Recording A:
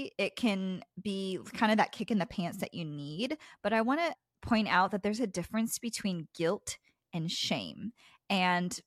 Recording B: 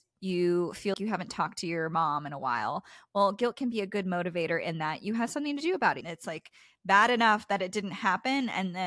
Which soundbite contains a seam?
B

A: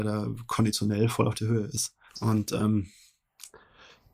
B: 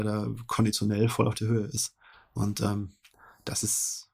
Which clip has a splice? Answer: A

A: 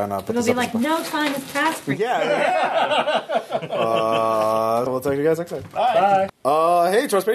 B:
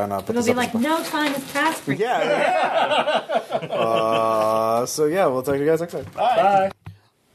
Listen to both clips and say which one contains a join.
A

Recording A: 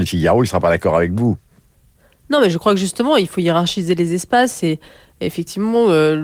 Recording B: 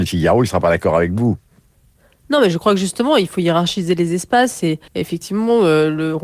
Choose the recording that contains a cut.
B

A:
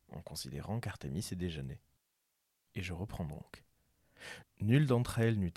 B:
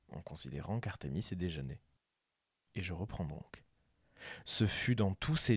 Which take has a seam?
A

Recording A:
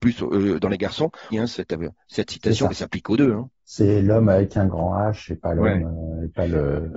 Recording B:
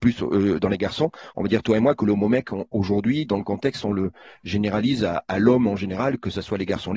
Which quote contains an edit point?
A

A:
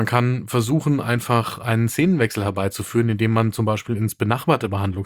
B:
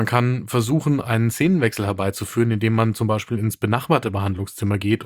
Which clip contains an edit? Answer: B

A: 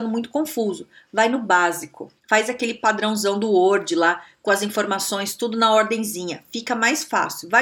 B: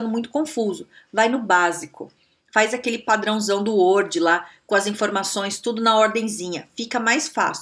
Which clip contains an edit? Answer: A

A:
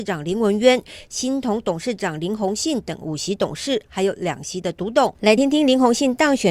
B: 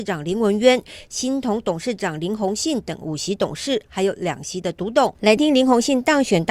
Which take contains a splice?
B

